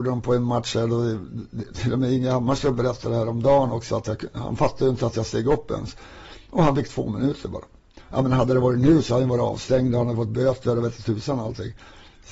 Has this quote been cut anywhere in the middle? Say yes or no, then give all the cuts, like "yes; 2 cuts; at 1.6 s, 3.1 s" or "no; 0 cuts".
no; 0 cuts